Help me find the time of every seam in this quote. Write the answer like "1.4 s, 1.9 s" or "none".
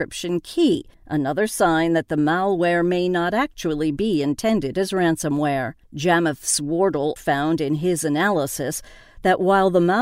0.9 s, 5.8 s, 7.2 s